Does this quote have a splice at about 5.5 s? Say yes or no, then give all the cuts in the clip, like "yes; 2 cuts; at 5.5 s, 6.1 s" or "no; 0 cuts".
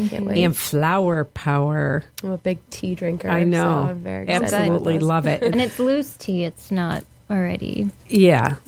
yes; 1 cut; at 5.5 s